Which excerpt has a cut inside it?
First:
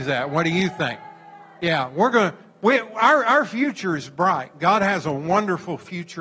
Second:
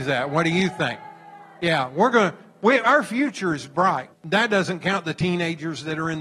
second; 2 cuts; at 2.8 s, 4.1 s

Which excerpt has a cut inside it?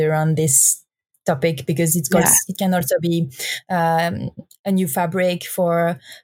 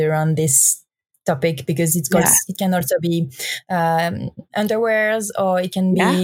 second; 1 cut; at 4.5 s

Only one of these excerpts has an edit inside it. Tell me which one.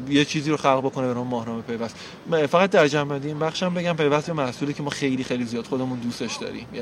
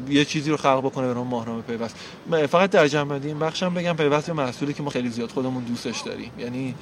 second; 1 cut; at 4.9 s

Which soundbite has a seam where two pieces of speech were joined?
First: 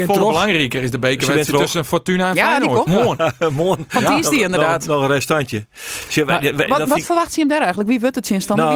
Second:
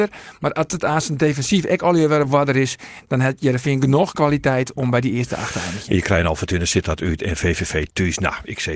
first; 1 cut; at 2.9 s

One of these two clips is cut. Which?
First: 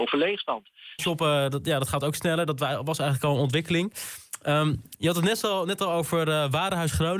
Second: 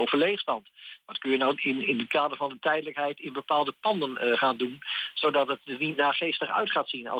first; 1 cut; at 1.0 s

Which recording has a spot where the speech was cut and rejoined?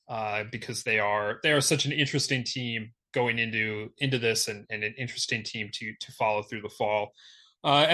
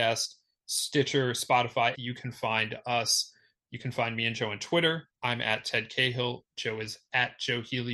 second; 1 cut; at 1.9 s

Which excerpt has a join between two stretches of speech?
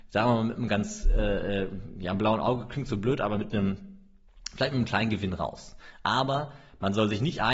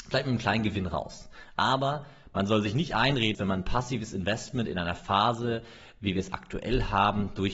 second; 1 cut; at 3.3 s

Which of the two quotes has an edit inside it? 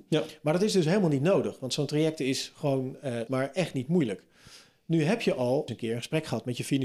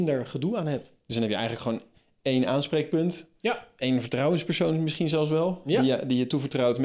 first; 2 cuts; at 3.3 s, 5.7 s

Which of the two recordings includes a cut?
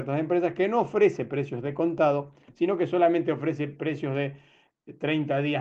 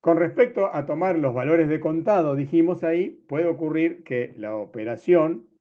second; 1 cut; at 2.8 s

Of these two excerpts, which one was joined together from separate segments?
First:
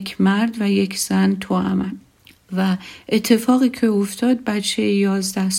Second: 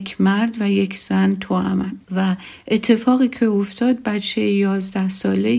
second; 1 cut; at 2.0 s

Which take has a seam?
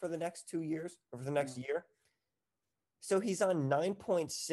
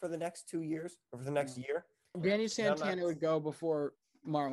second; 1 cut; at 2.1 s

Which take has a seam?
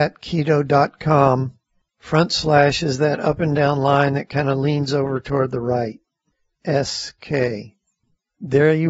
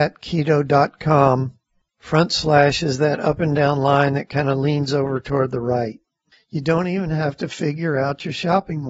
second; 1 cut; at 6.3 s

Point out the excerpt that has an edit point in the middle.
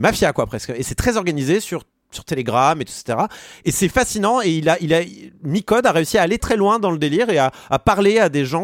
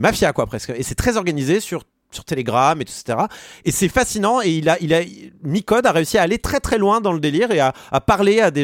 first; 1 cut; at 6.4 s

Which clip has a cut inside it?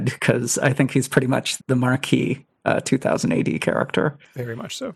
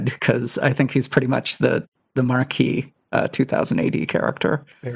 first; 1 cut; at 1.6 s

